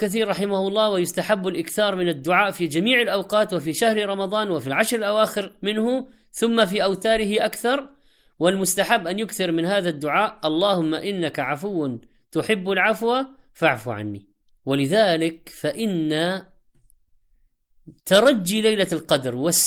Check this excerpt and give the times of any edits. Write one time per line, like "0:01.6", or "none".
0:14.6
0:18.0